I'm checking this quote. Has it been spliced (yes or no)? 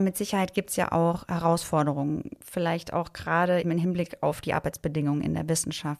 yes